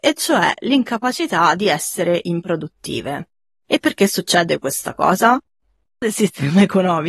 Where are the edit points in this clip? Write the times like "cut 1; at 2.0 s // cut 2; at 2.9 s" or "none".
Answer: cut 1; at 6.0 s